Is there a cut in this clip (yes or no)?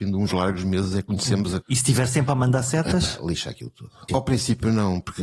yes